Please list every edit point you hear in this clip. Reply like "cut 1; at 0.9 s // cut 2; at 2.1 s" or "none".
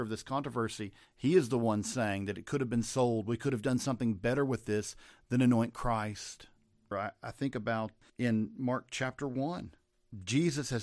cut 1; at 6.9 s

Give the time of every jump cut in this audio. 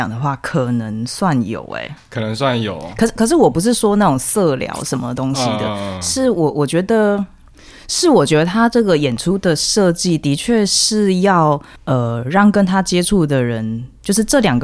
none

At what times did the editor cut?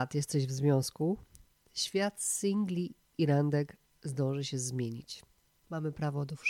cut 1; at 5.5 s

